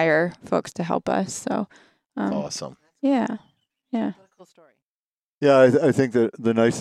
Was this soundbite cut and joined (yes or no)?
no